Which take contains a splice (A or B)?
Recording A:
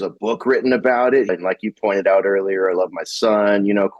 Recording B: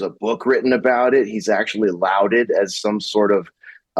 A